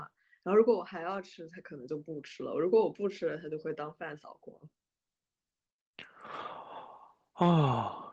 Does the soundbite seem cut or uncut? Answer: uncut